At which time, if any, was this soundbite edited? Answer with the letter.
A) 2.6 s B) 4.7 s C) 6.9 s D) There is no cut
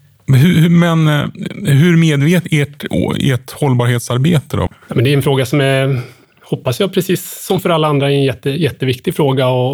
B